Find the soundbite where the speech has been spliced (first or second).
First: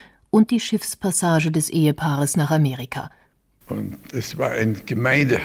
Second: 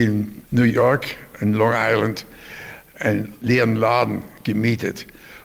first